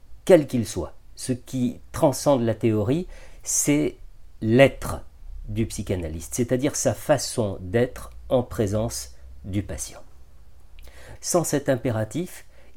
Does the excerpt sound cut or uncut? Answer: cut